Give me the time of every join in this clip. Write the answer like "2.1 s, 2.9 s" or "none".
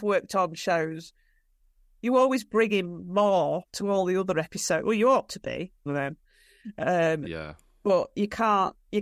5.9 s